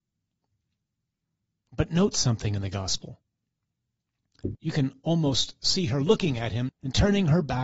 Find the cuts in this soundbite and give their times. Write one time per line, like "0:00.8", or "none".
0:04.5
0:06.7